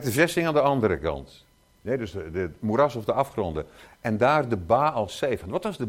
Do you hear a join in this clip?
no; 0 cuts

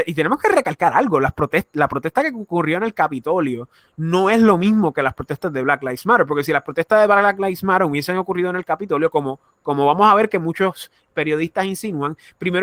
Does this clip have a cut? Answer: no; 0 cuts

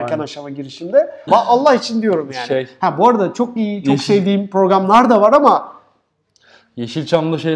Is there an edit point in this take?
yes; 1 cut; at 1.3 s

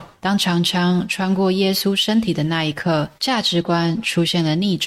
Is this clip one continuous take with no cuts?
no; 1 cut; at 3.2 s

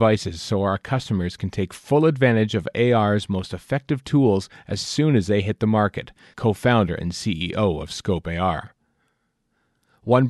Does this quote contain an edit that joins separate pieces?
yes; 1 cut; at 6.3 s

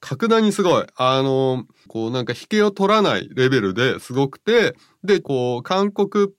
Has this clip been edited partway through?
yes; 2 cuts; at 1.9 s, 5.2 s

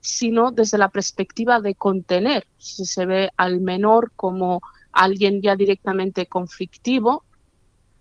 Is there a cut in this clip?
no; 0 cuts

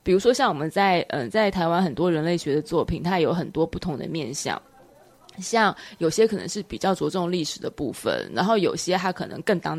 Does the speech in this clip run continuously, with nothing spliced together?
yes; 0 cuts

